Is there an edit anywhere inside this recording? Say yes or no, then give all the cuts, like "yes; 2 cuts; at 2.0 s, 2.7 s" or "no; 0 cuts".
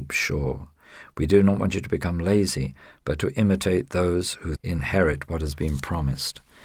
yes; 1 cut; at 4.6 s